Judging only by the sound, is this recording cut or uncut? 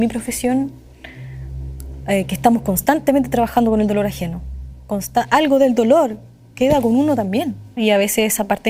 cut